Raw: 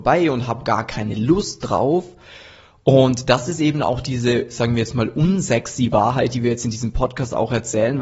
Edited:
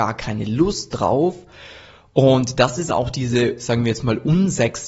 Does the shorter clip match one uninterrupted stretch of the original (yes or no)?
no